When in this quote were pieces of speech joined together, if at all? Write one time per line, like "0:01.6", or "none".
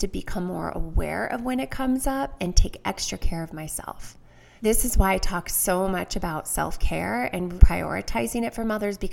0:04.6
0:07.6

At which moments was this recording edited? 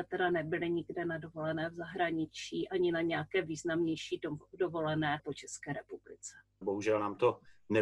0:05.2
0:06.6

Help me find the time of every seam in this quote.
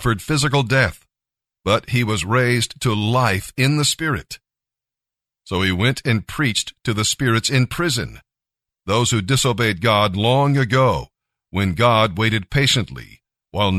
none

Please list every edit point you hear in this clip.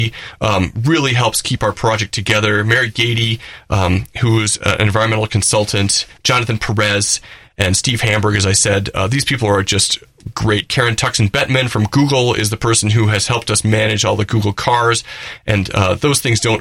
0:06.2

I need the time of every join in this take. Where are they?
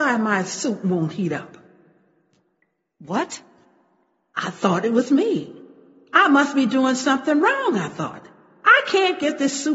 none

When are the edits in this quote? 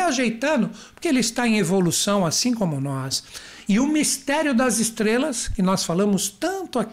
none

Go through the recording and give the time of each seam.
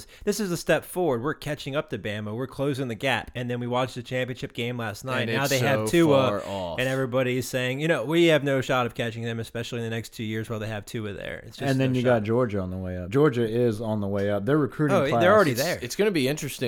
none

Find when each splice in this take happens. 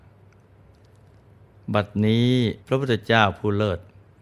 0:02.6

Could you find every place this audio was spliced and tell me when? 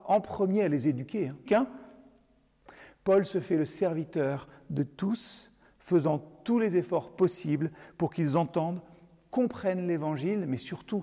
0:01.5

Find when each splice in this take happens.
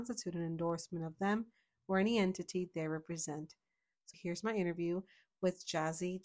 0:04.1

